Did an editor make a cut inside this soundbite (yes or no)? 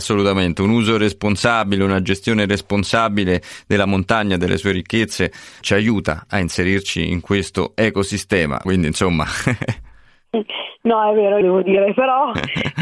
yes